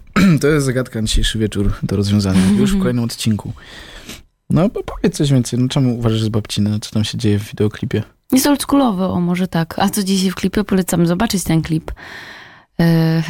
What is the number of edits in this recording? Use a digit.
0